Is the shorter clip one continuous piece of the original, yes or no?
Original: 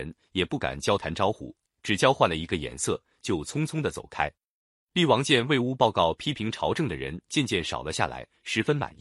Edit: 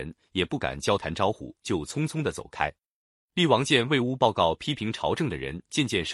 no